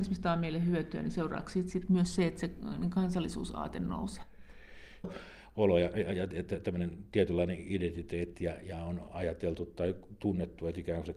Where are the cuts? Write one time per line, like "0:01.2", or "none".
0:05.0